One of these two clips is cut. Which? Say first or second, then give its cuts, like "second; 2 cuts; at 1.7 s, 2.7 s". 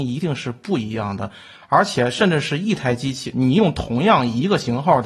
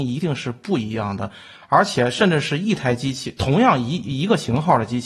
first; 1 cut; at 3.3 s